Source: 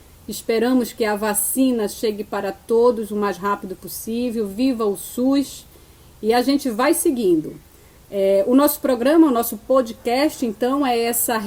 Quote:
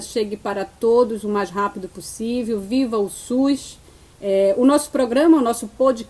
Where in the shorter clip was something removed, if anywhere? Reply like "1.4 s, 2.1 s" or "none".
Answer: 4.1 s